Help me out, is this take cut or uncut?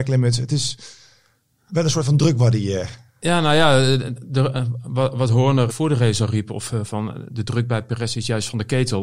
cut